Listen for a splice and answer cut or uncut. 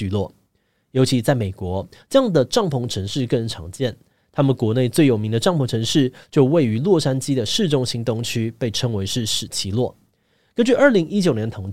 uncut